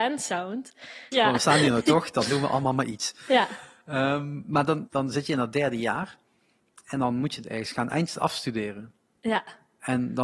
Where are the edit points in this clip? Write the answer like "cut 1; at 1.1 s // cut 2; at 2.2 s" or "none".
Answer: cut 1; at 1.1 s // cut 2; at 4.9 s